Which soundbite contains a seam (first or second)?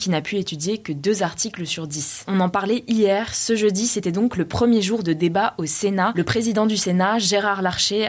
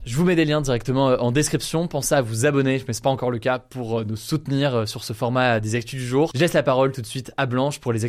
first